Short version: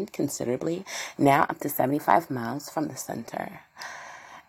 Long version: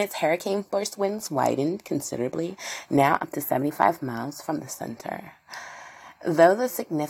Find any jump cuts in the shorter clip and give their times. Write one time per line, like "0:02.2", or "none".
none